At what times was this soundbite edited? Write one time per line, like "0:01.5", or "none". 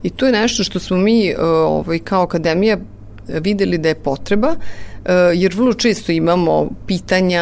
none